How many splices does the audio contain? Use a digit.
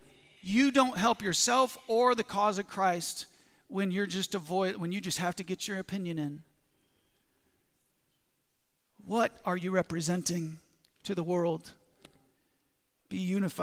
0